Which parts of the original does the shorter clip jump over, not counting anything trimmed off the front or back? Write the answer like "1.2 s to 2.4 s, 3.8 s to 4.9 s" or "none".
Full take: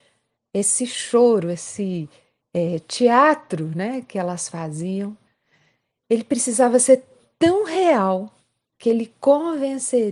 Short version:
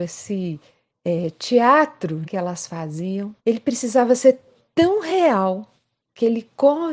3.7 s to 4.1 s, 5.2 s to 6.0 s